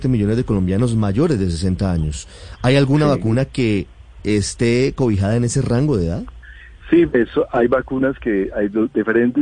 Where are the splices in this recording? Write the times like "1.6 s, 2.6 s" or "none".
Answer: none